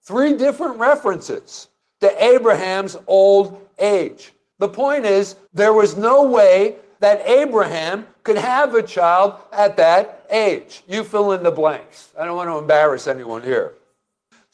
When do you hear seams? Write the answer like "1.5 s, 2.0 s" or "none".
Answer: 5.5 s